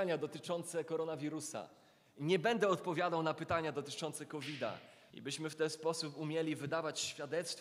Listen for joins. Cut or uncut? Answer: cut